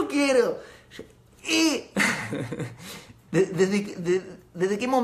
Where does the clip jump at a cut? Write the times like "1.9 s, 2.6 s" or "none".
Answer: 1.3 s, 3.3 s